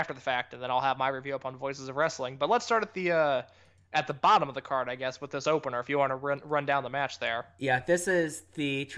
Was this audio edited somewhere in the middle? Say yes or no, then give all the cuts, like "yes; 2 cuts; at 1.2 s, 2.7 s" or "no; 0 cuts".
no; 0 cuts